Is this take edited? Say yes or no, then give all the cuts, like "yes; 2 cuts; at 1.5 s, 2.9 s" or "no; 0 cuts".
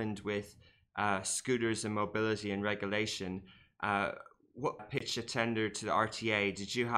yes; 1 cut; at 4.8 s